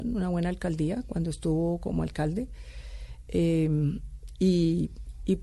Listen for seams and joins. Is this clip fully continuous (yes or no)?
yes